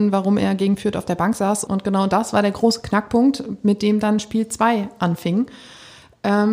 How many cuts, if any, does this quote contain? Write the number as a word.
one